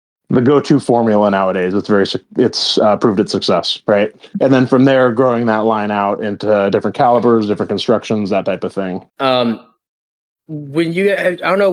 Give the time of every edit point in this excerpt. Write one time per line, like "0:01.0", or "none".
0:04.3
0:09.1